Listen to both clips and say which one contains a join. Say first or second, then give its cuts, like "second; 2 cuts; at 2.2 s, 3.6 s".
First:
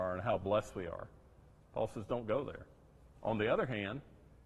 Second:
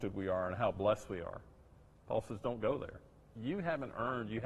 second; 1 cut; at 3.3 s